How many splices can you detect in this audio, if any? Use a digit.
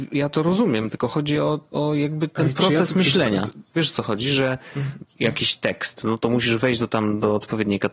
1